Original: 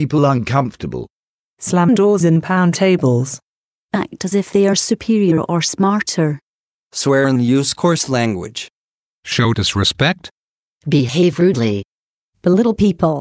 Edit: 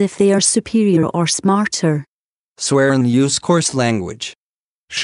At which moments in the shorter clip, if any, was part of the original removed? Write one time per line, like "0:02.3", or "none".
none